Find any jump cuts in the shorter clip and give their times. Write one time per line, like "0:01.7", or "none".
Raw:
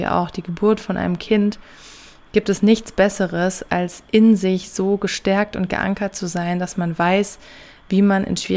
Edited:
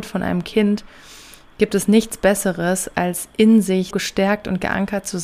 0:03.9